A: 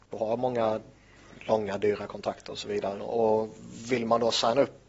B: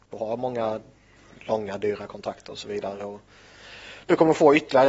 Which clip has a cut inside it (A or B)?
A